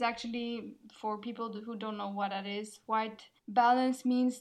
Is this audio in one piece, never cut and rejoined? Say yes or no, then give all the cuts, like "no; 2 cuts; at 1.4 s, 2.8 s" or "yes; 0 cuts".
no; 1 cut; at 3.4 s